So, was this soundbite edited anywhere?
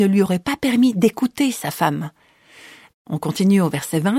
yes; 1 cut; at 2.9 s

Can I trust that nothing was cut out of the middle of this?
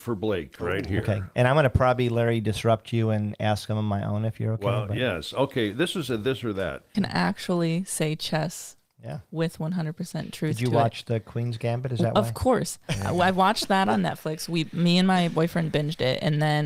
no; 1 cut; at 6.9 s

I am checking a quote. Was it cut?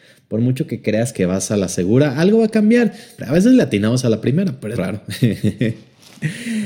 yes; 2 cuts; at 3.2 s, 4.8 s

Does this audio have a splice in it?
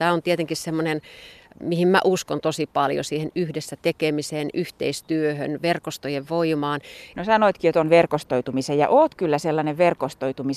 yes; 1 cut; at 7.1 s

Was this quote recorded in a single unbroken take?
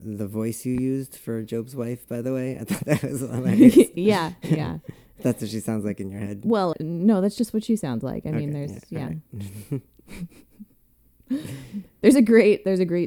no; 1 cut; at 6.7 s

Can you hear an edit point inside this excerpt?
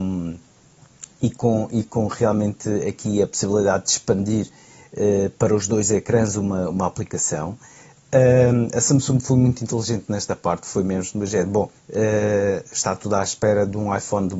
yes; 1 cut; at 11.8 s

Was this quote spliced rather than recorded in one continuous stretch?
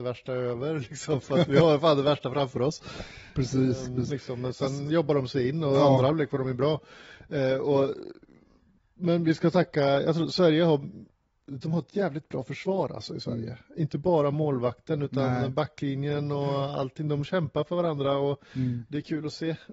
yes; 1 cut; at 4.1 s

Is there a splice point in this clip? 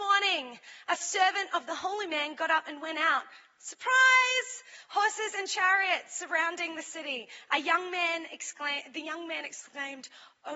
no; 0 cuts

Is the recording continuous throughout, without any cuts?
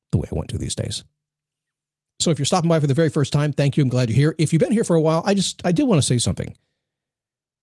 yes; 0 cuts

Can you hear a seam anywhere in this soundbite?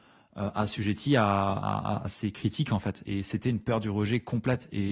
no; 0 cuts

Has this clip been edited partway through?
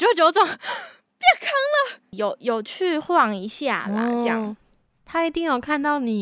yes; 1 cut; at 2.1 s

